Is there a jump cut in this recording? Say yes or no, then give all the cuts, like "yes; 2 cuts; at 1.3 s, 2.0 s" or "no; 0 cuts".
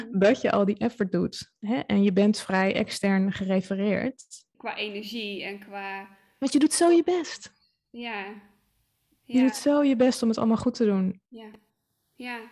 yes; 2 cuts; at 4.5 s, 11.3 s